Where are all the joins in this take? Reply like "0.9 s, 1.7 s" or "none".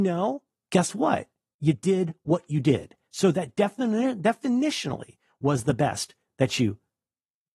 1.5 s